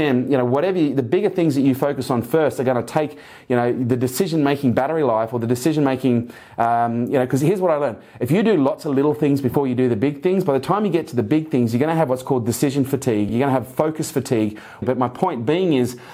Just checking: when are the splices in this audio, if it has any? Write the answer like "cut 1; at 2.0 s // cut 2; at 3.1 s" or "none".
cut 1; at 13.3 s // cut 2; at 14.8 s